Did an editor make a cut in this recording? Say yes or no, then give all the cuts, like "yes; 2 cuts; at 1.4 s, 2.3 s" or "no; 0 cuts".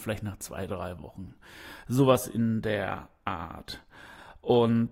no; 0 cuts